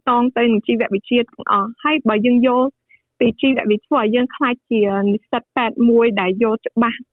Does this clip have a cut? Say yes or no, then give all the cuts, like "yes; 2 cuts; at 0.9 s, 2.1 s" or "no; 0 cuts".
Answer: no; 0 cuts